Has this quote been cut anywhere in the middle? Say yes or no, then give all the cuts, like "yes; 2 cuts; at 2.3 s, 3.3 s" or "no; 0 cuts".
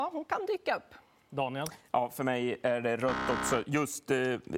no; 0 cuts